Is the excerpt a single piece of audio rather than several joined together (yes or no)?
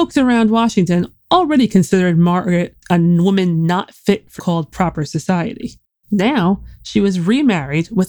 no